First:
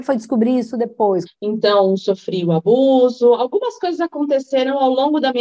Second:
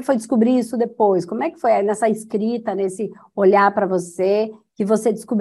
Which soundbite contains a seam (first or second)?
first